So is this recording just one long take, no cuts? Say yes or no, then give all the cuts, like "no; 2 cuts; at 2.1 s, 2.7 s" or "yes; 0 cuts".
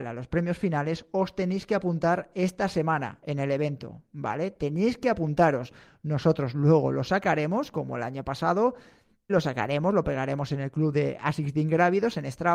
no; 1 cut; at 9.3 s